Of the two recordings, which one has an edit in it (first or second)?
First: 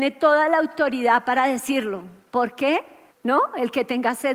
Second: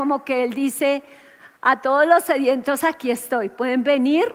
first